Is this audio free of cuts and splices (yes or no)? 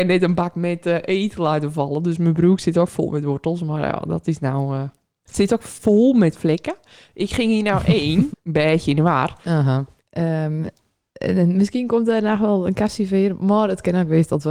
no